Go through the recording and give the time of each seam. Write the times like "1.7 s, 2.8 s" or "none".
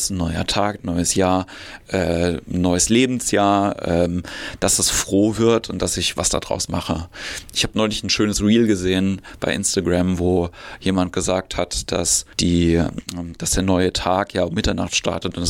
12.3 s